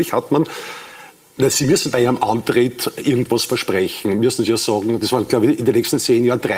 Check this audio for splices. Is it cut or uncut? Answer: uncut